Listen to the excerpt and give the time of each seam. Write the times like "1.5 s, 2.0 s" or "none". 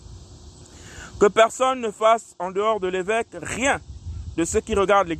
none